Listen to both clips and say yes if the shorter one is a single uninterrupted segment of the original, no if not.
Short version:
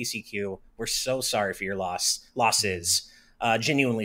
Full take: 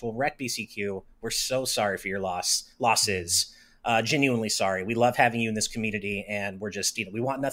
yes